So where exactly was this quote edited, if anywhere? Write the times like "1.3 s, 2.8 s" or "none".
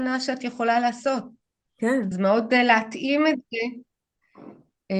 none